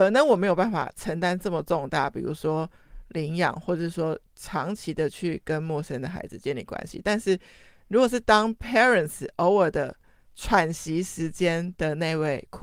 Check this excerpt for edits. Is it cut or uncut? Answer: uncut